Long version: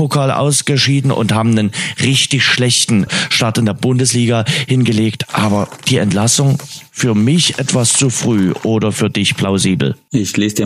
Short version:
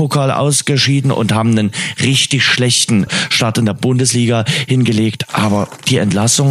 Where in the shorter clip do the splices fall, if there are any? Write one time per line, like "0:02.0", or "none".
none

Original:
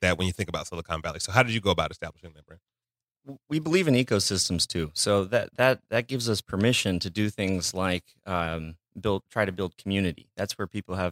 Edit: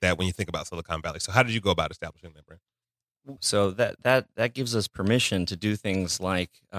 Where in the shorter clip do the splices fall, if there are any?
0:03.4

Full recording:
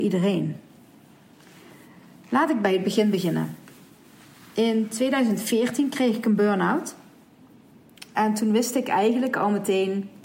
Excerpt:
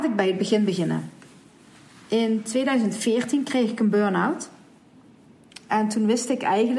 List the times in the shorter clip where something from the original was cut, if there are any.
none

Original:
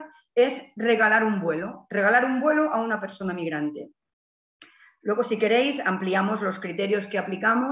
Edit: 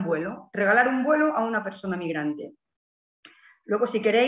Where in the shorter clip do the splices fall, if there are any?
none

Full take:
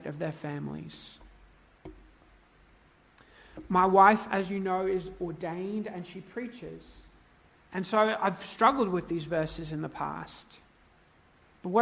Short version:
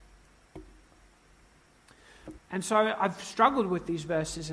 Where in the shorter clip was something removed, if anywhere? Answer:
0:02.4

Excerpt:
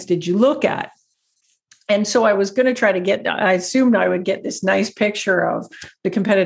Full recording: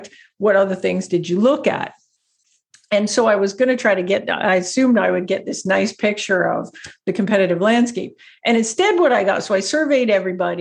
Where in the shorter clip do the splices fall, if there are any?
none

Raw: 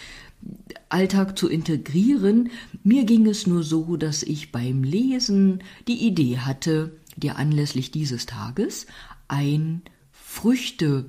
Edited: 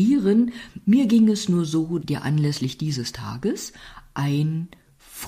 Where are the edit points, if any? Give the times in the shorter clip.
0:02.0

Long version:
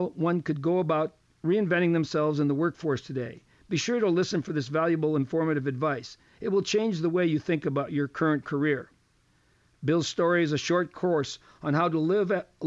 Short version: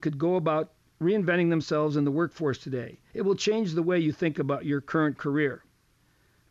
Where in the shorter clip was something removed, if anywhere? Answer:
0:03.1

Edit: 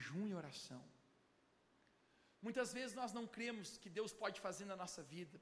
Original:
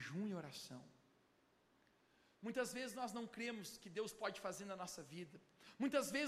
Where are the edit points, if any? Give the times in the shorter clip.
none

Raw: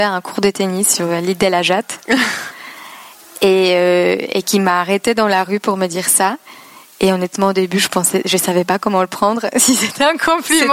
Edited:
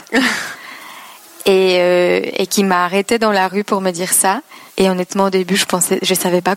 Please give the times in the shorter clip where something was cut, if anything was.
0:04.7

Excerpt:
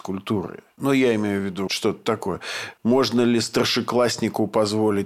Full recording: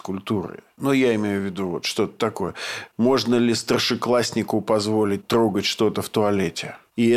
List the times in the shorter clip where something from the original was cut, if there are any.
0:01.7

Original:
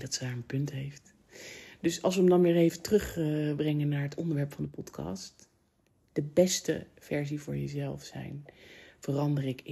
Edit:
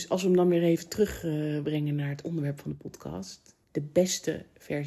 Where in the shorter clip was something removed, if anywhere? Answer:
0:03.6

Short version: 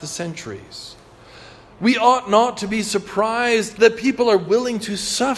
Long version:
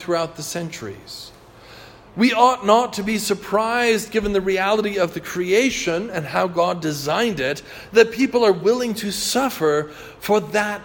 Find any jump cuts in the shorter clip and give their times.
0:03.7

